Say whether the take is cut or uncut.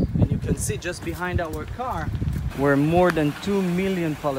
cut